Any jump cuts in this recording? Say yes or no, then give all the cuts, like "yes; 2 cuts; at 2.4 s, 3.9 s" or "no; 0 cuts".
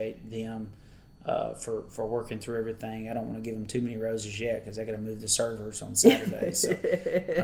no; 0 cuts